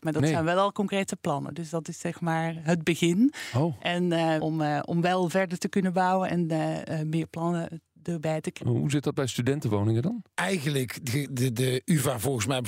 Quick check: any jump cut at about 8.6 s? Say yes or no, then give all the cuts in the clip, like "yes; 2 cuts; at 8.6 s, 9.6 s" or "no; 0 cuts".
yes; 3 cuts; at 4.4 s, 8.6 s, 10.3 s